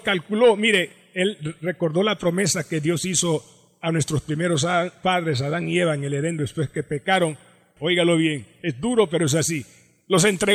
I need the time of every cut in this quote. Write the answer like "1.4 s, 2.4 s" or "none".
7.8 s

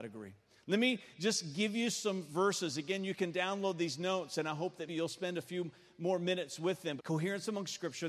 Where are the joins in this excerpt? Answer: 4.9 s, 7.0 s

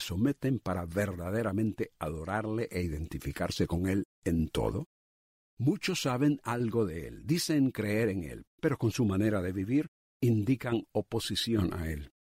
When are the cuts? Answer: 8.5 s

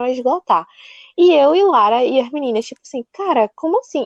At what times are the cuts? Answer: none

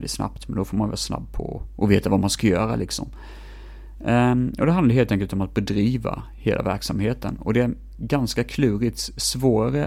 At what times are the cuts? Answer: none

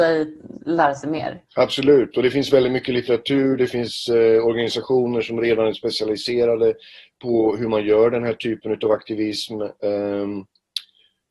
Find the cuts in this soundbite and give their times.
1.5 s

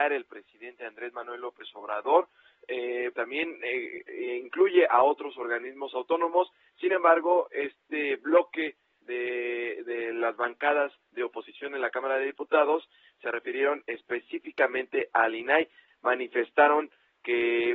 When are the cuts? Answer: 3.1 s, 15.9 s

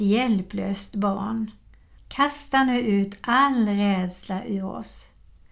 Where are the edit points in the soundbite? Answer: 2.0 s

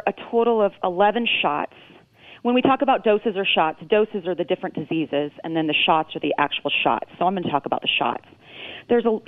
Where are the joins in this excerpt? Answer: none

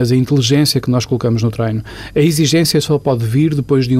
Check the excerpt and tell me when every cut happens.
none

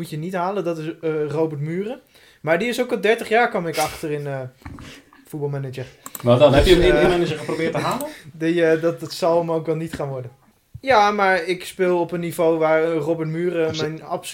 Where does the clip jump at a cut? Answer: none

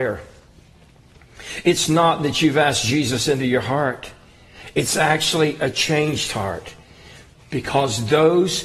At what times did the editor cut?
none

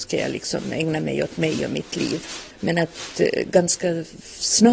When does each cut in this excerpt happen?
none

